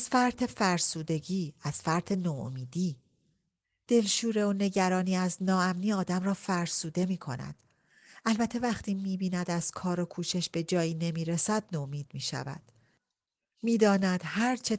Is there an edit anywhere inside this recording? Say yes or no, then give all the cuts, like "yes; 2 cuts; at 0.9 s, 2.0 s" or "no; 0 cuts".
no; 0 cuts